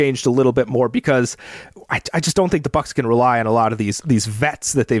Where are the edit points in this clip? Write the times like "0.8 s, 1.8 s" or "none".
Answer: none